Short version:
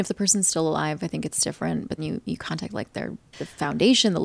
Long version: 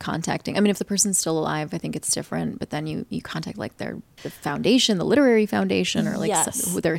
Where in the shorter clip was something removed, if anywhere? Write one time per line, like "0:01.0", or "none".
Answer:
0:02.0